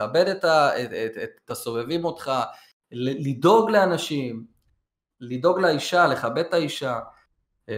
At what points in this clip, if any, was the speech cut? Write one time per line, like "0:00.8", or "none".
none